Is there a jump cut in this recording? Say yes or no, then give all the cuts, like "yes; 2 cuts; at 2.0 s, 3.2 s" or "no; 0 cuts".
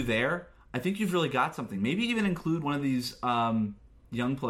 no; 0 cuts